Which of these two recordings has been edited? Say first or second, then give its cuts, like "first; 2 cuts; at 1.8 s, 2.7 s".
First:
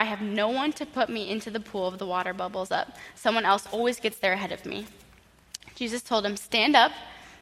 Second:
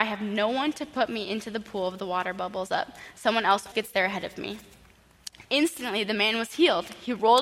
second; 2 cuts; at 3.7 s, 5.4 s